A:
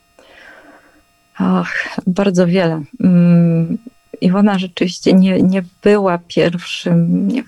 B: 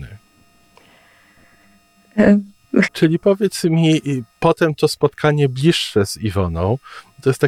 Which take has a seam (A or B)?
B